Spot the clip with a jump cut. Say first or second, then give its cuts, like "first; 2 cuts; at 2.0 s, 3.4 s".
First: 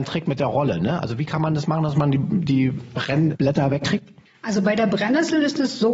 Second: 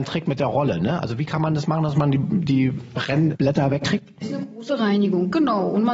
second; 1 cut; at 4.2 s